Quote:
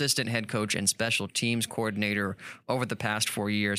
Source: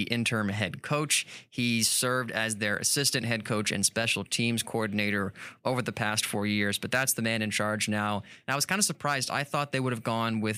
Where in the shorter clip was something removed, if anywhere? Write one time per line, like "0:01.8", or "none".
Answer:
none